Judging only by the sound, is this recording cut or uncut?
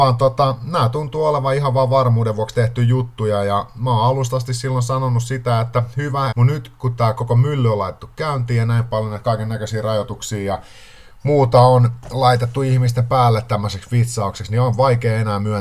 cut